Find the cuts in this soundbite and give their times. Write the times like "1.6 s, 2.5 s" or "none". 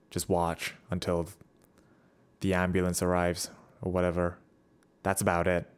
none